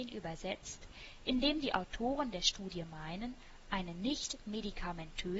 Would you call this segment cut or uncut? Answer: uncut